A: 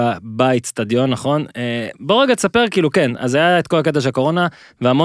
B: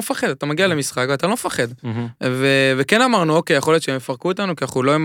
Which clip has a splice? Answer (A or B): B